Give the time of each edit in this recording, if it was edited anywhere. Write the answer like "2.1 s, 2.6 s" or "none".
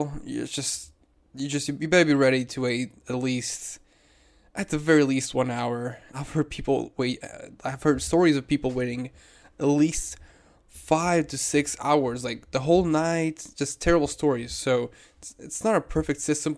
6.1 s